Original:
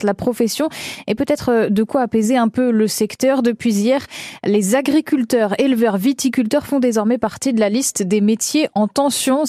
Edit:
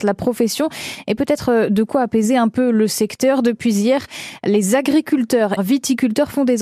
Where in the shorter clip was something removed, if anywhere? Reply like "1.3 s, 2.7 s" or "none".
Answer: 5.6 s